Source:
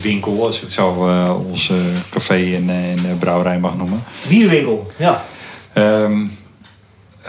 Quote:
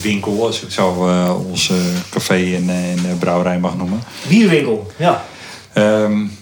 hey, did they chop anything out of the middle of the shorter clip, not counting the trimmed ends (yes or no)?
no